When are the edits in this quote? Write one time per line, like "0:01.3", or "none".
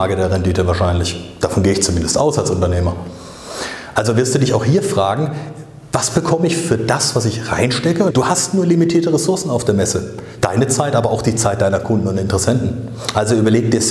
0:08.1
0:10.4